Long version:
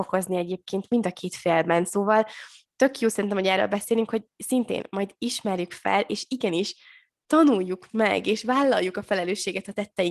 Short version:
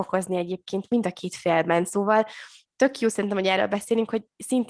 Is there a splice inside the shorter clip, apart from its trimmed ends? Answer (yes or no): no